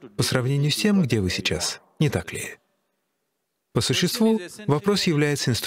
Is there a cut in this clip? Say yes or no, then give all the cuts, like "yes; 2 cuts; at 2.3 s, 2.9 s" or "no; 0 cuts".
yes; 1 cut; at 3.7 s